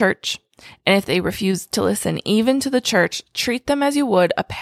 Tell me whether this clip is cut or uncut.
uncut